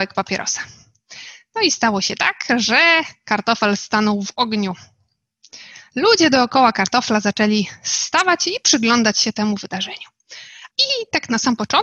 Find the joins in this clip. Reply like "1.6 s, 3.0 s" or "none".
10.7 s